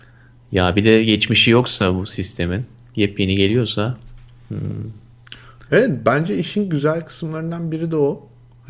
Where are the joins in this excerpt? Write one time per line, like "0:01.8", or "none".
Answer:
none